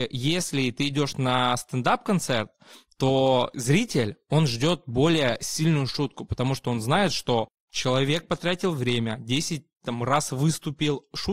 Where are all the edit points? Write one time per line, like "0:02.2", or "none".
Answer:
none